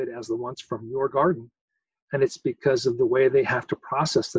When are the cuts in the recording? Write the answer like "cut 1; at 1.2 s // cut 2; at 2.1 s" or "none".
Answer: none